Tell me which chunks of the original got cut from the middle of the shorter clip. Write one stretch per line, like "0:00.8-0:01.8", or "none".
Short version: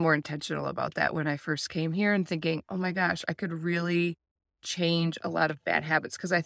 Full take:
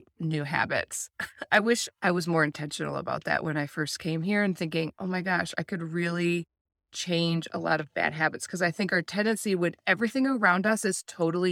none